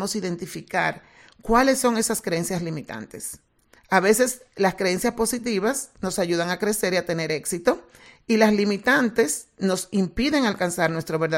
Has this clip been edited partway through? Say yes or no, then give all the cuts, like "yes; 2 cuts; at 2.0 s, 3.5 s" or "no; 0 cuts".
yes; 1 cut; at 3.8 s